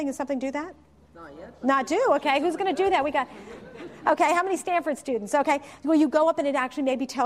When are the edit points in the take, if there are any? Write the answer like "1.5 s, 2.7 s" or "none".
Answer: none

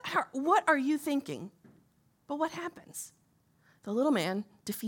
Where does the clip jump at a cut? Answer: none

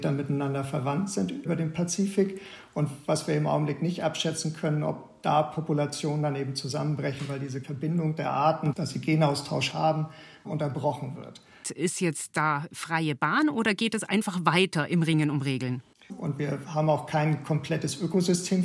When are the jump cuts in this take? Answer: 11.6 s, 16.1 s

